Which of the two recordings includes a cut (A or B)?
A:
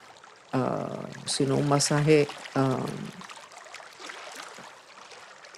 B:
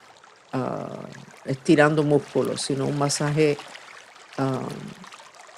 A